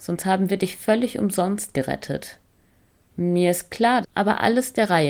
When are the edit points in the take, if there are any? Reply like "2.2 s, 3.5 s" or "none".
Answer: 4.0 s